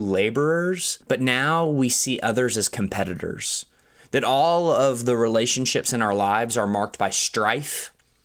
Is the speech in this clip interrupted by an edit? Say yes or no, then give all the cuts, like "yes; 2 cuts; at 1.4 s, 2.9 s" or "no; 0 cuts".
yes; 1 cut; at 1.0 s